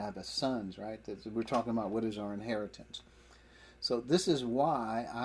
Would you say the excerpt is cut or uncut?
uncut